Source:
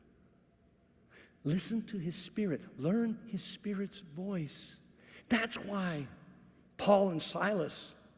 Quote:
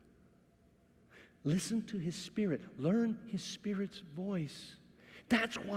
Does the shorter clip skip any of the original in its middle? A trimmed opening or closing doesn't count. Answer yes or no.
no